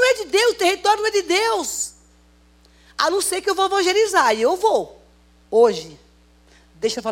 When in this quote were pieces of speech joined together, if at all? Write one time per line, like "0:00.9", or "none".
0:05.5